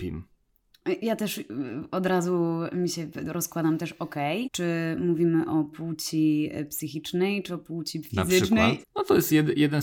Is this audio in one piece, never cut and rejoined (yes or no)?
no